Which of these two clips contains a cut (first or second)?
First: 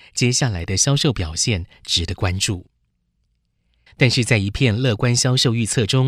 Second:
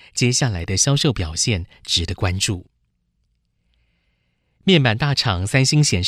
first